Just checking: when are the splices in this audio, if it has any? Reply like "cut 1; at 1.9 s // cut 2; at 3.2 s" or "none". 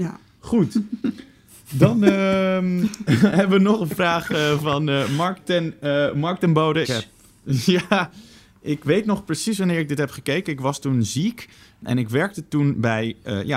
cut 1; at 6.8 s